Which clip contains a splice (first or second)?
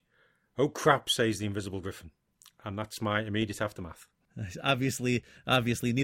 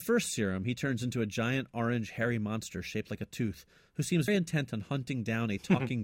second